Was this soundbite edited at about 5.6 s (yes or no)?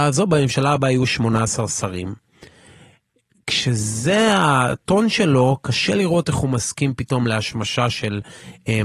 no